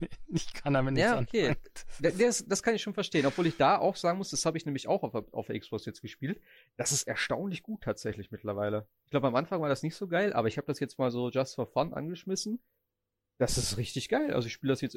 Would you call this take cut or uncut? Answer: uncut